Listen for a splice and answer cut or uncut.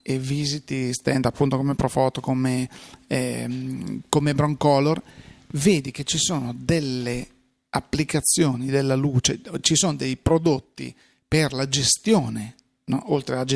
uncut